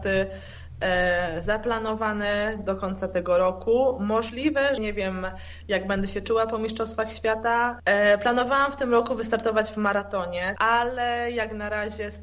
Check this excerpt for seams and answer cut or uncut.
cut